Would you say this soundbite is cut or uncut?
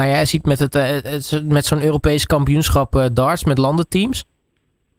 uncut